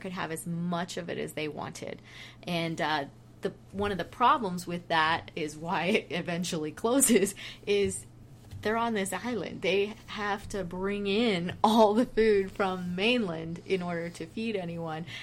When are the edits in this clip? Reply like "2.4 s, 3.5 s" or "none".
none